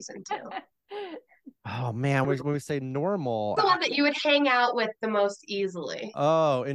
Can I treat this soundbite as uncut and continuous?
no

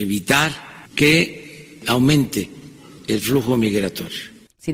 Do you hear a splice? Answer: yes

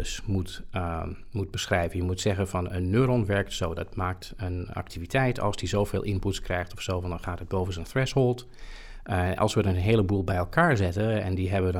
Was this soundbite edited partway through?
no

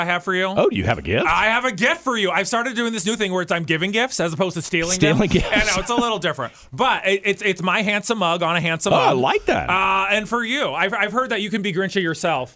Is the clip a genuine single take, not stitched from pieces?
yes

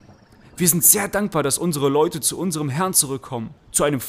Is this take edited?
no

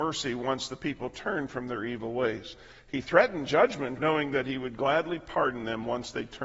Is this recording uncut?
no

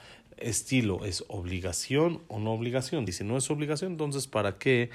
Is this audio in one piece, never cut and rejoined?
no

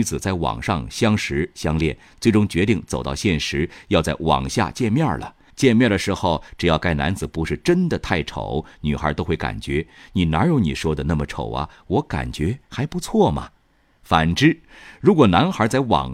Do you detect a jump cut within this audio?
yes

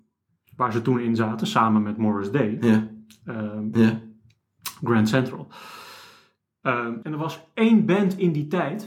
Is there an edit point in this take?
yes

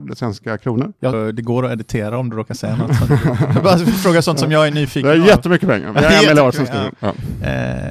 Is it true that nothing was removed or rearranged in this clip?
no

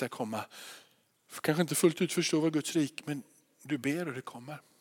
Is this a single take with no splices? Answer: yes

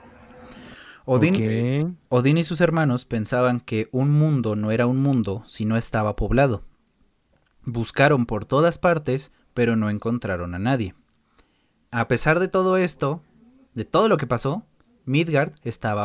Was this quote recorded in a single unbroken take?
no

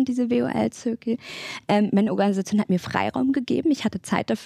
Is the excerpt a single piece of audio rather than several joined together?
yes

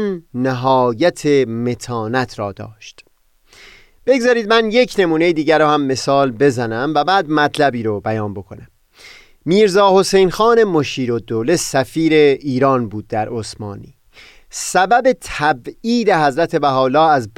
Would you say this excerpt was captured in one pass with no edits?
yes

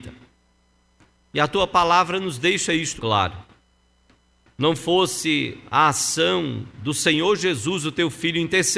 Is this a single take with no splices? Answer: no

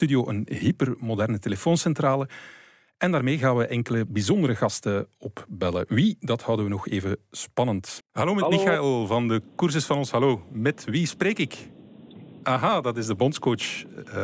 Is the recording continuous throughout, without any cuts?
no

